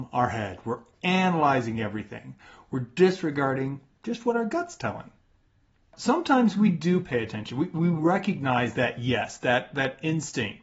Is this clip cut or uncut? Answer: uncut